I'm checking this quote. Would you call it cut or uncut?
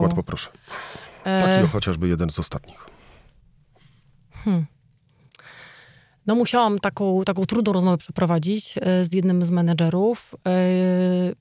uncut